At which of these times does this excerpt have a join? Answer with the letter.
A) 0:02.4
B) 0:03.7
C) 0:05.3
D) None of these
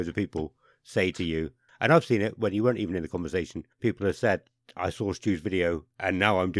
B